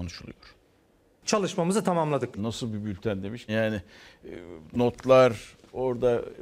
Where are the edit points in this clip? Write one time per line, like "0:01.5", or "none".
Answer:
0:02.4
0:03.5